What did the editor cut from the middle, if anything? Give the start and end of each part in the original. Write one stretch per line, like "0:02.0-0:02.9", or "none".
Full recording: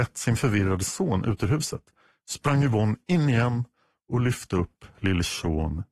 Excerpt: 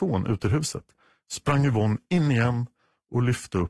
none